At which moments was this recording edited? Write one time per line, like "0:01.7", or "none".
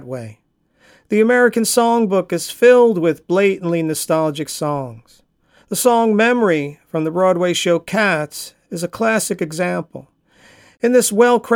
none